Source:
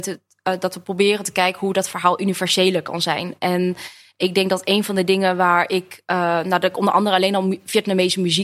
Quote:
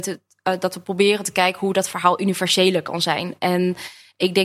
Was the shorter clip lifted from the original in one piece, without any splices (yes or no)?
yes